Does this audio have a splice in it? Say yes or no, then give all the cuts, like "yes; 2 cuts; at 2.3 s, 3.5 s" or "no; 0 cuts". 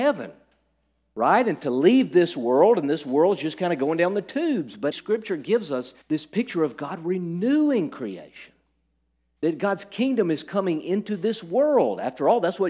yes; 2 cuts; at 4.9 s, 6.0 s